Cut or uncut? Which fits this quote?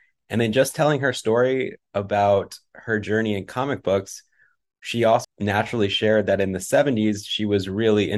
cut